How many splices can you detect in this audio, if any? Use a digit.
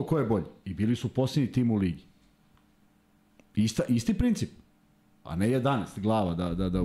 1